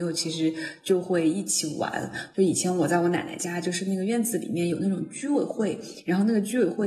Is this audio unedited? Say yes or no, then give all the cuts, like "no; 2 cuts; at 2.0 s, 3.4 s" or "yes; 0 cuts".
yes; 0 cuts